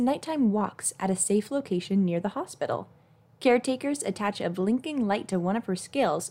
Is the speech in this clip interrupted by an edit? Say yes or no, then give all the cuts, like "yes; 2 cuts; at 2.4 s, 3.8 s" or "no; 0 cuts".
no; 0 cuts